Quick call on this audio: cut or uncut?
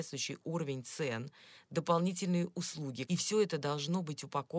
cut